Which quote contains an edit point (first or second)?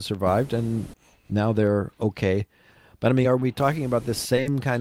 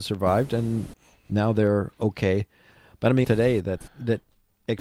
second